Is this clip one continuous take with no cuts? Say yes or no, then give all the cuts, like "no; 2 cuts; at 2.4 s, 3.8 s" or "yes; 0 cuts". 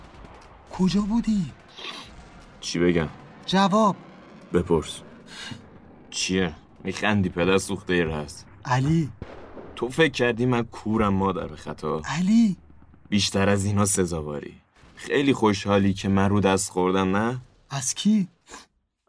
yes; 0 cuts